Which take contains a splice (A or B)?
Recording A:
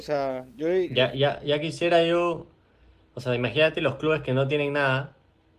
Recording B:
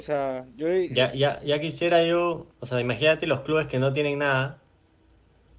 B